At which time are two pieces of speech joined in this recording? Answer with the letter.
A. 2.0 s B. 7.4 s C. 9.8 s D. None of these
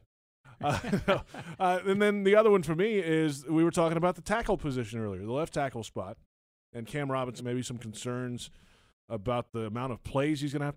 B